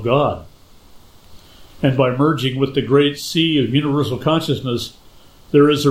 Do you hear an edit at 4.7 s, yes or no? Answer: no